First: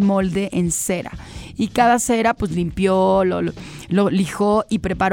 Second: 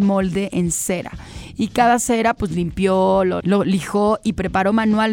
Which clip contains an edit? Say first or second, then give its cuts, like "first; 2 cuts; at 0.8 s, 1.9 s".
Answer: second; 1 cut; at 3.4 s